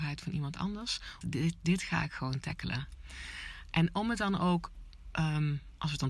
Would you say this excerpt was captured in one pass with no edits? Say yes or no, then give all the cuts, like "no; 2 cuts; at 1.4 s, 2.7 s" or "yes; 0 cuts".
no; 1 cut; at 1.2 s